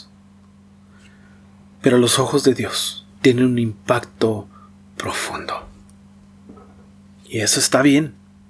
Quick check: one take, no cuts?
no; 2 cuts; at 3.1 s, 7.2 s

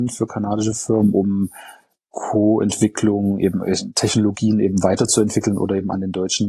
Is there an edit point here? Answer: no; 0 cuts

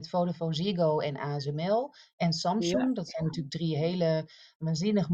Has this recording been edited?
no; 0 cuts

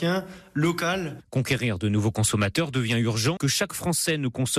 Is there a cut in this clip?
yes; 1 cut; at 3.4 s

